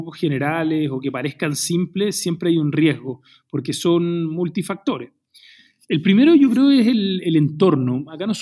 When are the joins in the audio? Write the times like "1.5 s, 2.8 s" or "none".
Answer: none